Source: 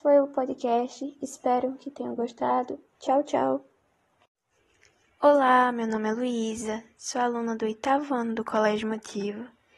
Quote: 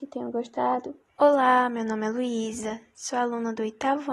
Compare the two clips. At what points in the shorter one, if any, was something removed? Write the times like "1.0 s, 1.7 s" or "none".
1.1 s